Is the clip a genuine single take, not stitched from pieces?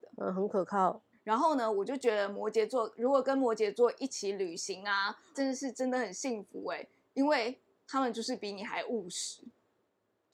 no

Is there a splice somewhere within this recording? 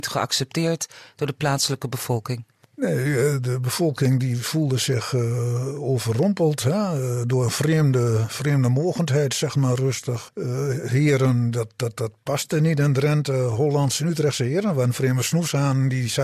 yes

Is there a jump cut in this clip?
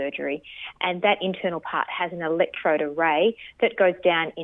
no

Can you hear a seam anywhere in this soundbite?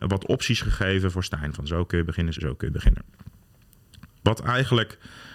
yes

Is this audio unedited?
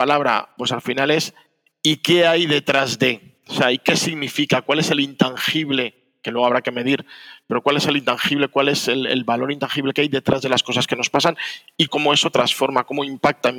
no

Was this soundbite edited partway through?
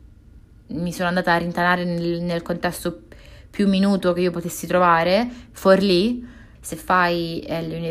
yes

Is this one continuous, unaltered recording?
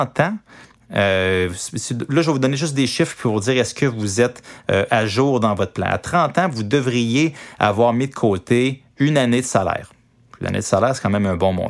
yes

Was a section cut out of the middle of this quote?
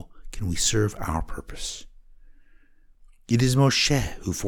no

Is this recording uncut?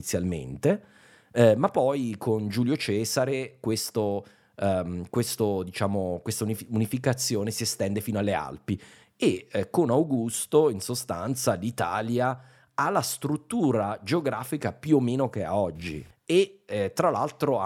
yes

